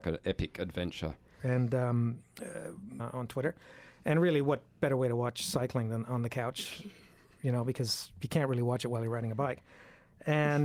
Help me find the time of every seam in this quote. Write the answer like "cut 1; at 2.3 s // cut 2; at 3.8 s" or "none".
cut 1; at 1.4 s // cut 2; at 3.0 s